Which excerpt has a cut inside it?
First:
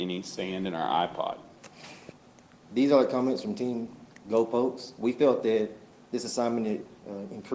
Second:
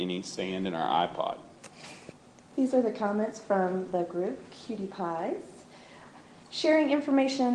second; 1 cut; at 2.5 s

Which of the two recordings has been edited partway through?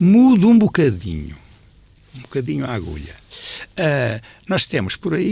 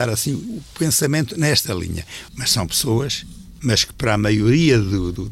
second; 2 cuts; at 2.3 s, 3.6 s

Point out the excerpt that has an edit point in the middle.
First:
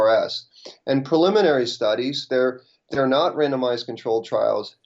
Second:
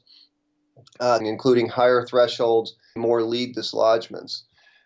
second; 2 cuts; at 1.2 s, 3.0 s

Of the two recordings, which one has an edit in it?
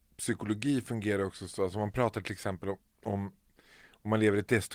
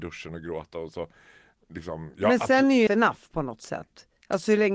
second; 1 cut; at 2.9 s

